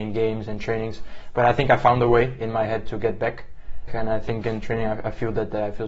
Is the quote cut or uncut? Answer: cut